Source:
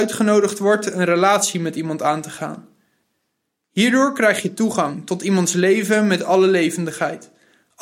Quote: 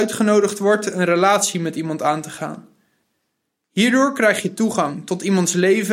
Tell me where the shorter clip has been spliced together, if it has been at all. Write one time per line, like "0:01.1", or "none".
none